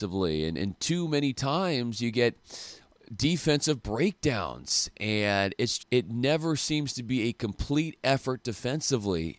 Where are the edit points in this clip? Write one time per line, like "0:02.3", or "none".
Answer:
0:05.8